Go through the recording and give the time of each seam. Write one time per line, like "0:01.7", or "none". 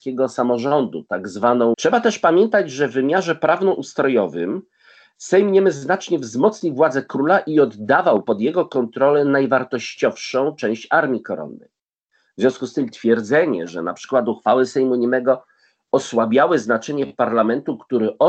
0:01.7

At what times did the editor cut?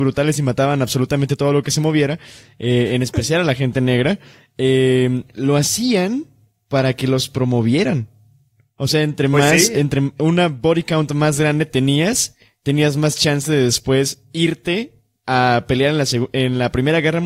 none

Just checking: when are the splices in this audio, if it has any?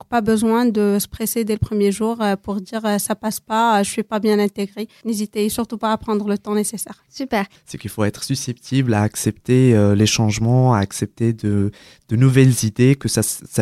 0:07.6

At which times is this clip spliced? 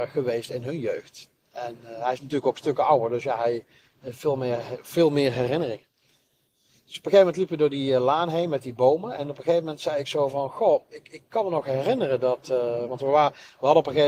none

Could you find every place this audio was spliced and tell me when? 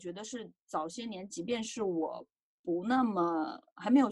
none

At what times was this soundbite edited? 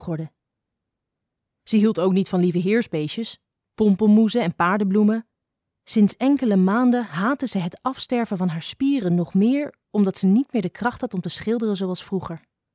0:05.8

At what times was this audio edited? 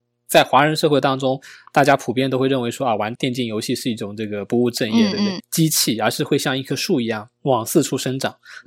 0:03.2
0:05.4

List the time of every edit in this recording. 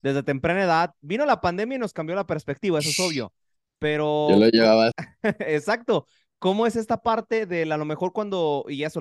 0:04.9

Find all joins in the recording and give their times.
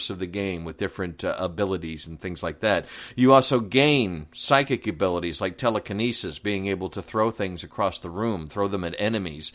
none

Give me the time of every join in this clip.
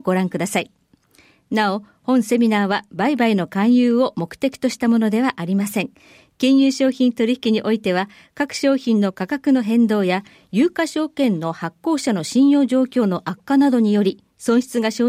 none

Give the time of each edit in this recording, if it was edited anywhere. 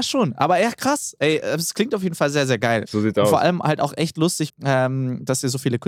0:02.8
0:04.5

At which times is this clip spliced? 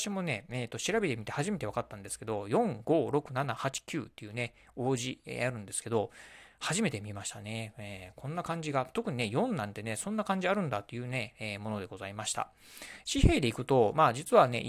0:13.0

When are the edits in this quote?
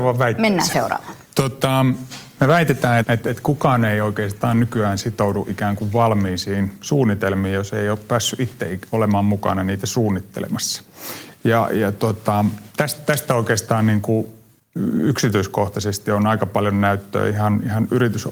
0:03.0

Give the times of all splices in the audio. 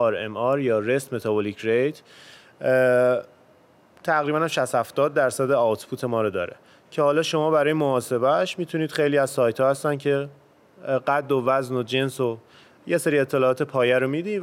none

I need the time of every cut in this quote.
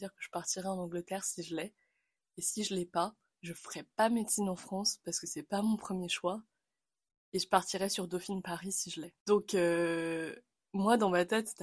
none

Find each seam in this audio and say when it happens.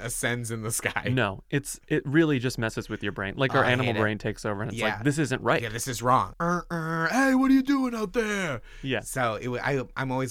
0:06.3

